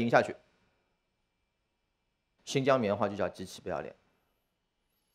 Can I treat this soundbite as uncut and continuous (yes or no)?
no